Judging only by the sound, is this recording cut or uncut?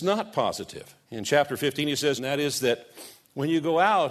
cut